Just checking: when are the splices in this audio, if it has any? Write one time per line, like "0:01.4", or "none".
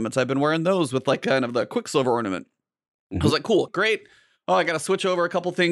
0:03.7

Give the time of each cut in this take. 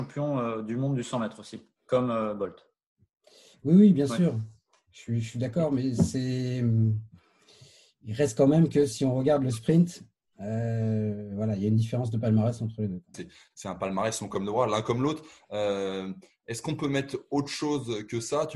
0:13.1

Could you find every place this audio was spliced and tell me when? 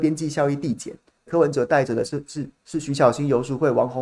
0:01.3

